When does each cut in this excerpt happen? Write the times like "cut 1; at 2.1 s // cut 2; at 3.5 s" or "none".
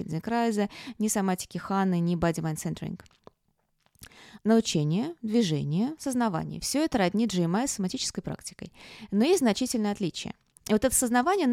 cut 1; at 4.4 s // cut 2; at 10.6 s

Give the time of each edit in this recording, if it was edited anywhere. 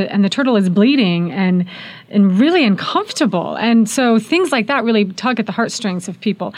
none

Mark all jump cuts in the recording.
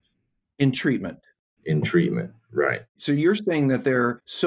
none

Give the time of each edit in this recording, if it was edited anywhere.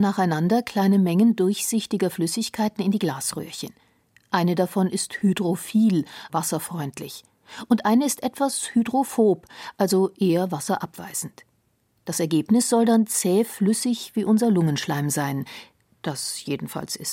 cut 1; at 6.3 s

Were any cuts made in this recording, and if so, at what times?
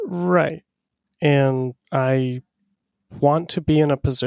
cut 1; at 1.8 s

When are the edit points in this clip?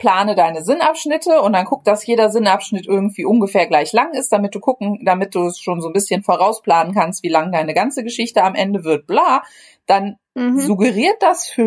none

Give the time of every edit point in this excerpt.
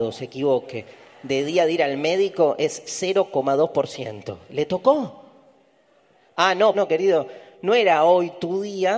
cut 1; at 6.7 s

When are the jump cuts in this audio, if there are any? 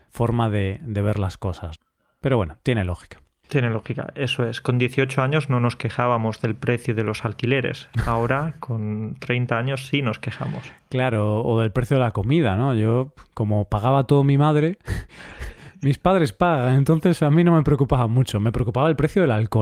none

